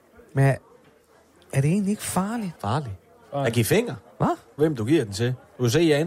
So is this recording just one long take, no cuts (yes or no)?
no